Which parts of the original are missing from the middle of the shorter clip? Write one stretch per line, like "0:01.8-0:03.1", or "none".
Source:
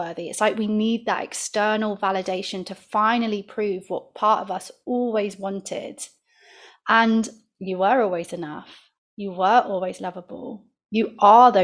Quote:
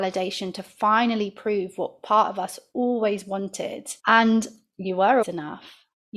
0:06.1-0:06.8
0:08.0-0:08.3